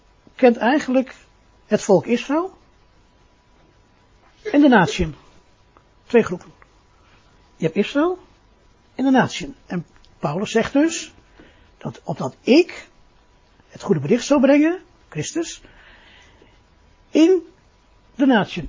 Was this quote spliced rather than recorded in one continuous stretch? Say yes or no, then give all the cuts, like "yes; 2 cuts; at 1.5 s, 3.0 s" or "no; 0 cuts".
yes; 1 cut; at 15.0 s